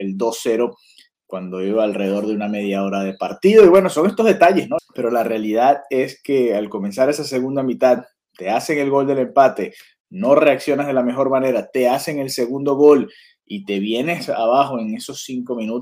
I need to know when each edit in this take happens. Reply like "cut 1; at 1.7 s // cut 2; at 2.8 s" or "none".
cut 1; at 4.8 s